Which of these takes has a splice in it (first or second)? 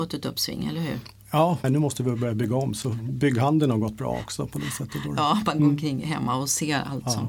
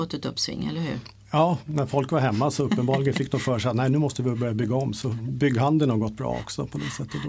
first